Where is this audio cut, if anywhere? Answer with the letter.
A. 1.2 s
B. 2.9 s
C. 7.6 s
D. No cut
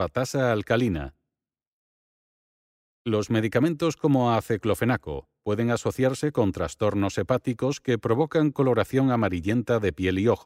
D